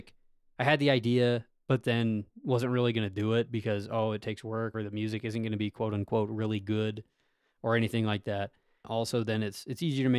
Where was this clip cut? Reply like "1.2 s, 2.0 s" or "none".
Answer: 4.7 s, 8.8 s